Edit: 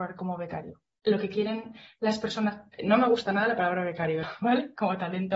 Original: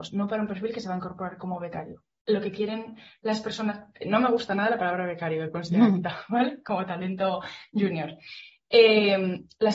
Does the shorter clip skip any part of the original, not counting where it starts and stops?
yes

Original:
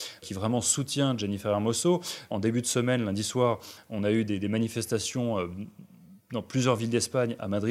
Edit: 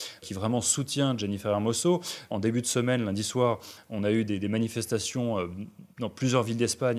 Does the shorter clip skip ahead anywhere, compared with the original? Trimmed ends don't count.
yes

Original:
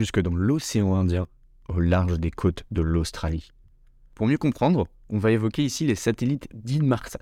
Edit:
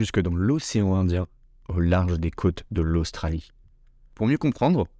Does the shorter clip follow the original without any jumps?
yes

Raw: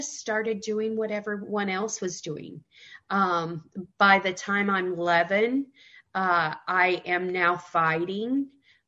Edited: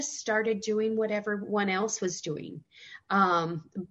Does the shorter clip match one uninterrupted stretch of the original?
yes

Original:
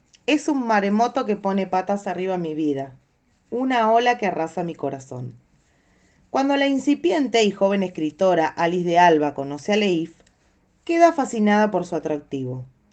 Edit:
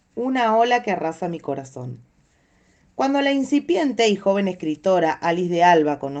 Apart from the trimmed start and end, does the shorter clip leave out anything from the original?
no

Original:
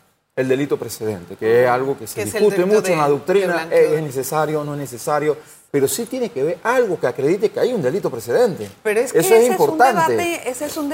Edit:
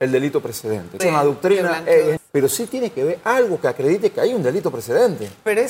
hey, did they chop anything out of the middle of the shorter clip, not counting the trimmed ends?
yes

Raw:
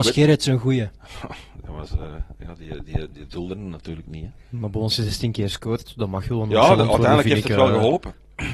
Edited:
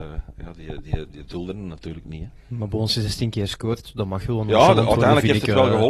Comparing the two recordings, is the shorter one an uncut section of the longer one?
yes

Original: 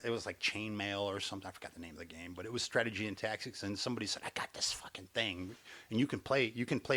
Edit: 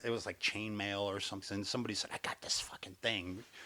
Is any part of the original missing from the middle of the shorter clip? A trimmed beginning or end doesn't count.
yes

